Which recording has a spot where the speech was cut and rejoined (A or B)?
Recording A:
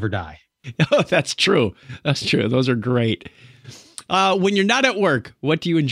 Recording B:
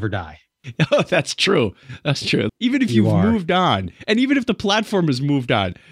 B